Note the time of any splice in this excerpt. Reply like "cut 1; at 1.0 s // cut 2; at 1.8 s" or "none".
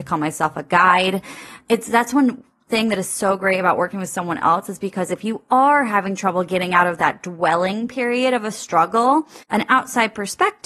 cut 1; at 9.4 s